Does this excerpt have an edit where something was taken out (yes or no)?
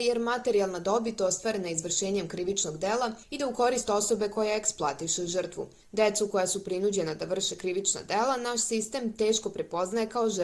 no